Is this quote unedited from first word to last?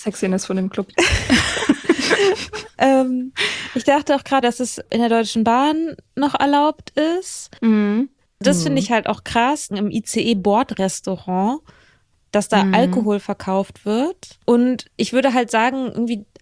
no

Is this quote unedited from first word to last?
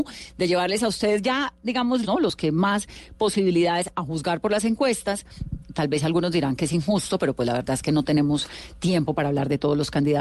no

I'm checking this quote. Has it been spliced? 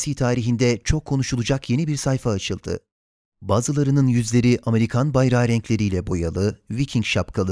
no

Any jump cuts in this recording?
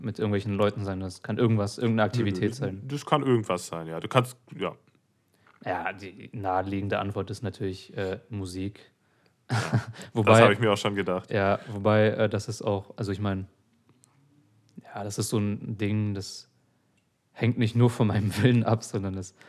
no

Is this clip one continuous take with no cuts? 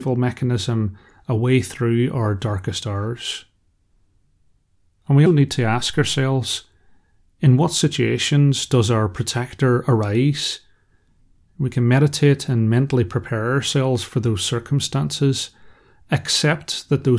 no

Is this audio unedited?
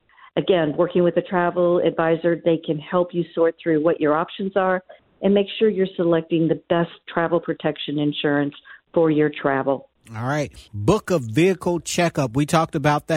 yes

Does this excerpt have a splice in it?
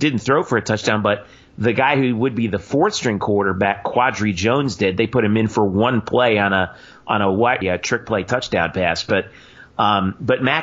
yes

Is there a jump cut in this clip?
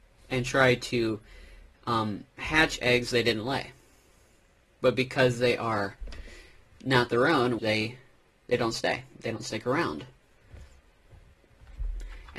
yes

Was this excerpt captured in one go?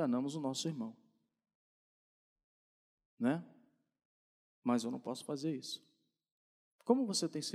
yes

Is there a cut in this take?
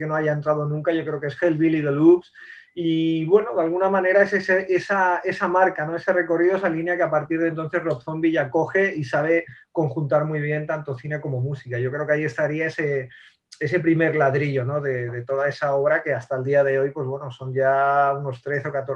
no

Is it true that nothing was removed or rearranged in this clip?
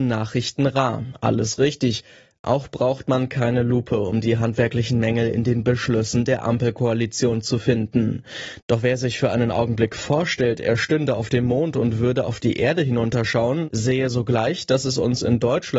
no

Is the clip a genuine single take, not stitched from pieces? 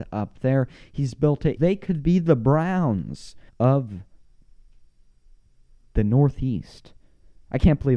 no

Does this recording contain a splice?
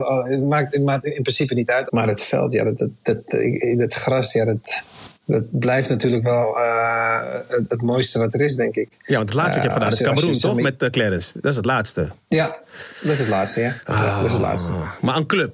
yes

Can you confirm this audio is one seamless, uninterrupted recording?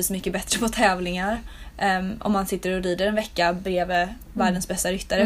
yes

